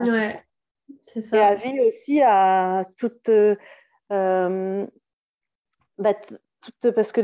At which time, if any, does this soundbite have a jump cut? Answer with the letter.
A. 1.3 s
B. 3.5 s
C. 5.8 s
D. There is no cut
D